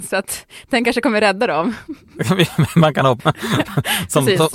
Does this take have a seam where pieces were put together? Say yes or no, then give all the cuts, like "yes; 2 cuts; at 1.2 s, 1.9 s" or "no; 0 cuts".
yes; 1 cut; at 3.2 s